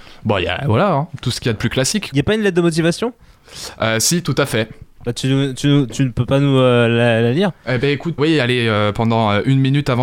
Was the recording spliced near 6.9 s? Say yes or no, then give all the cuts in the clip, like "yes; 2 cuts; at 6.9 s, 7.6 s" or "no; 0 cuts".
no; 2 cuts; at 2.1 s, 8.2 s